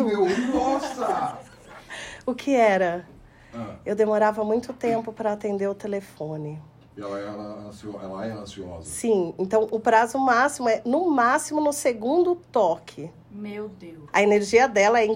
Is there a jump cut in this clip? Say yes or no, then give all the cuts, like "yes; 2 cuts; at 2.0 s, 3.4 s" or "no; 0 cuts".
yes; 1 cut; at 14.1 s